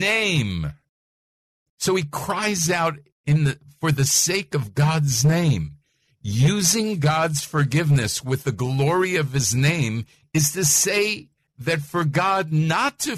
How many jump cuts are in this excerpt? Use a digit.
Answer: 0